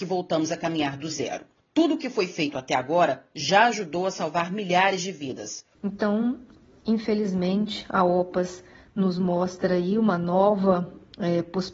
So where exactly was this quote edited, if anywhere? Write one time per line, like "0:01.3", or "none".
0:01.6
0:05.8